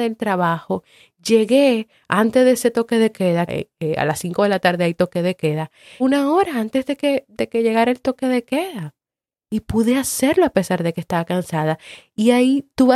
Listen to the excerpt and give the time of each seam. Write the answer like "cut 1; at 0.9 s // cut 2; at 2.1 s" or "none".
cut 1; at 3.5 s // cut 2; at 6.0 s

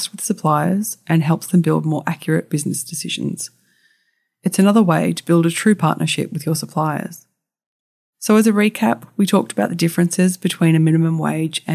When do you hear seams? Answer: none

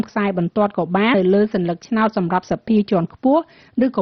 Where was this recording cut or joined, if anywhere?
cut 1; at 1.1 s

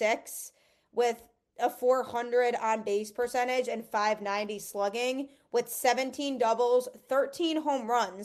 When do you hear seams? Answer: none

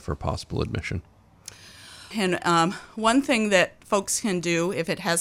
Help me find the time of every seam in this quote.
cut 1; at 2.1 s

